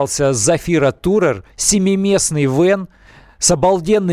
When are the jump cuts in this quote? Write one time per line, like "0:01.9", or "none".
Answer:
none